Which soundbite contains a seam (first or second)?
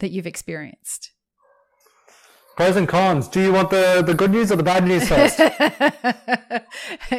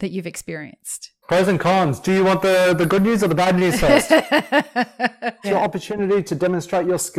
second